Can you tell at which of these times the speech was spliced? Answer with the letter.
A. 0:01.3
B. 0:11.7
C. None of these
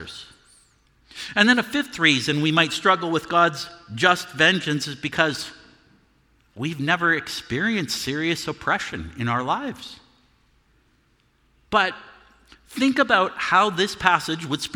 B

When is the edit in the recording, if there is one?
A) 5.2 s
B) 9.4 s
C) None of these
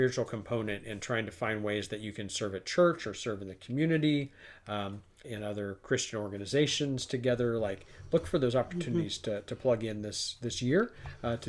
A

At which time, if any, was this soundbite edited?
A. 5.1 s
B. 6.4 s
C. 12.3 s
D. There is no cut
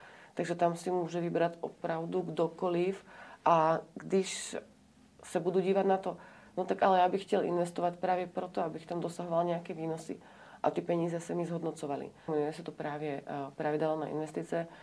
C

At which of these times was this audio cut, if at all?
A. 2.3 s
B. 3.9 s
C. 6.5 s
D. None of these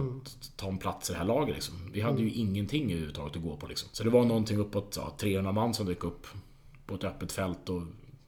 D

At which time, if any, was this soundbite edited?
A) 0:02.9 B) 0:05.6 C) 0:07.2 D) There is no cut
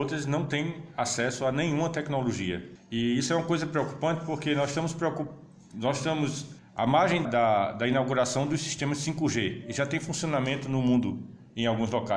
C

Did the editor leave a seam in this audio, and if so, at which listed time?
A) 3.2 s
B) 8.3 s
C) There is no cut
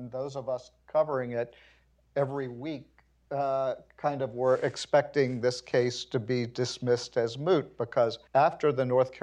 B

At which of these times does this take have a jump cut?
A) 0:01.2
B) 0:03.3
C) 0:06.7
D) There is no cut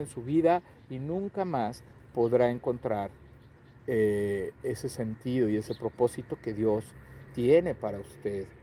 D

